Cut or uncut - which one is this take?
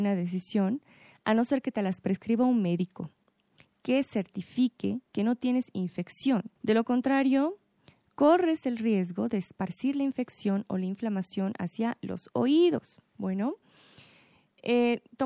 cut